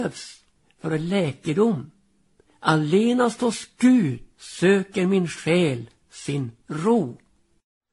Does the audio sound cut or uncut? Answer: cut